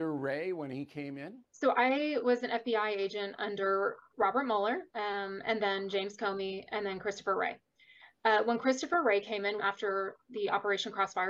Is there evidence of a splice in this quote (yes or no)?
yes